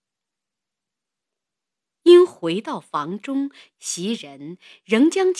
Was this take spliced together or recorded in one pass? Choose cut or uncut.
cut